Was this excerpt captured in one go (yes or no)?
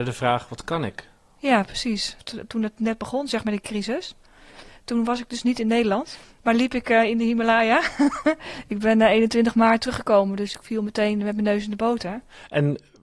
yes